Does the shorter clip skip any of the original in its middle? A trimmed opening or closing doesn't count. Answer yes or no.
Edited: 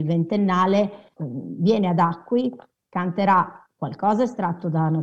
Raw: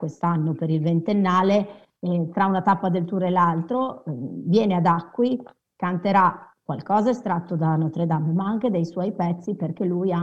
yes